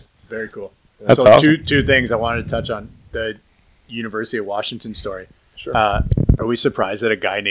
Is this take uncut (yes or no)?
yes